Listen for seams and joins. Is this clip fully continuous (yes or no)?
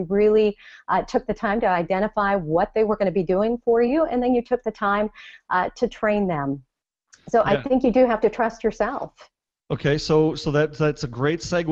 yes